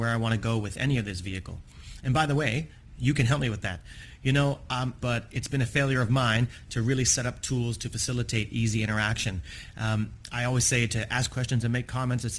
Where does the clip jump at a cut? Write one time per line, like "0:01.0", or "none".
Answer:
0:05.0